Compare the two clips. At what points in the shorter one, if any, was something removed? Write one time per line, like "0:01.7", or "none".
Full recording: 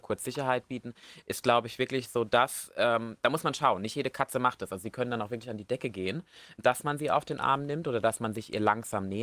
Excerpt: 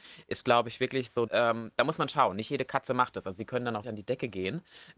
0:01.3
0:03.8